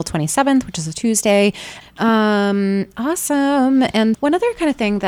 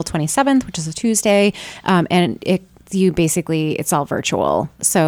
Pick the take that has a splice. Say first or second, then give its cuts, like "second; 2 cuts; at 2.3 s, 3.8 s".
first; 2 cuts; at 1.8 s, 4.1 s